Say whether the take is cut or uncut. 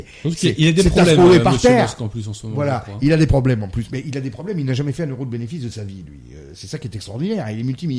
uncut